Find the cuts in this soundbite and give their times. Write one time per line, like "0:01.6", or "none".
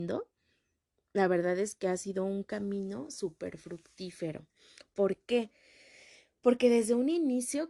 none